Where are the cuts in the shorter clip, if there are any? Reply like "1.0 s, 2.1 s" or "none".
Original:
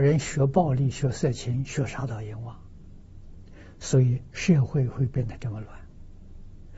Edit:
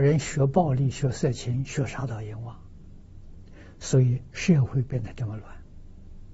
4.6 s